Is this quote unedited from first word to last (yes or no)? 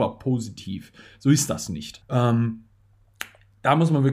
no